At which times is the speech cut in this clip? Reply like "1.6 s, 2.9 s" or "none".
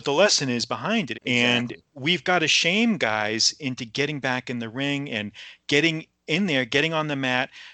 1.1 s